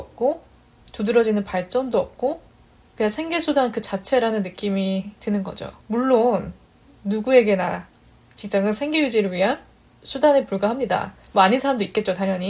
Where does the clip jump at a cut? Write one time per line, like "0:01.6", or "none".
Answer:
0:05.8